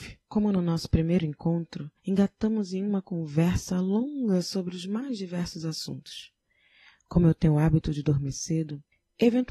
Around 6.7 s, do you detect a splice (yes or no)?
no